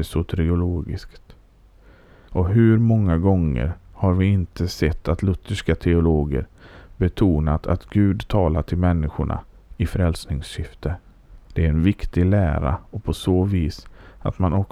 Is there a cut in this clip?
yes; 2 cuts; at 2.3 s, 11.5 s

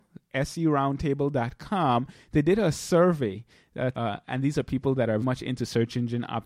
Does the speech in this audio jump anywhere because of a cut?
yes; 2 cuts; at 3.9 s, 5.2 s

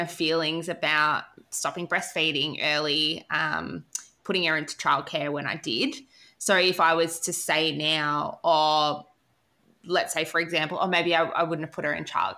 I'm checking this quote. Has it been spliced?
no; 0 cuts

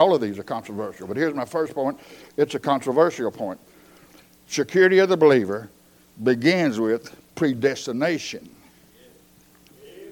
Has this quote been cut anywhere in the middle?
no; 0 cuts

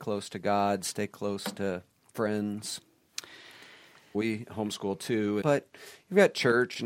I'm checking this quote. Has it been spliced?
yes; 2 cuts; at 4.1 s, 5.4 s

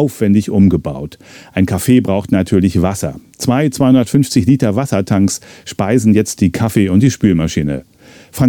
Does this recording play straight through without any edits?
yes; 0 cuts

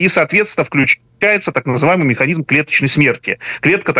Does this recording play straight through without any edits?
yes; 0 cuts

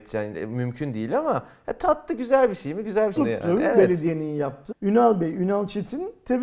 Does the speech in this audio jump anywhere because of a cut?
yes; 2 cuts; at 3.2 s, 4.7 s

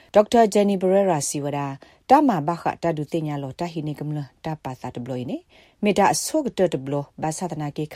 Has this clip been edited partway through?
no; 0 cuts

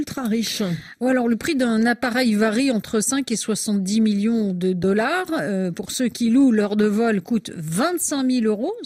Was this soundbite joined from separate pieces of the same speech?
no; 0 cuts

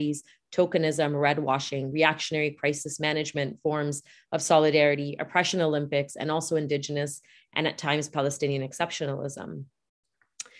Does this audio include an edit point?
no; 0 cuts

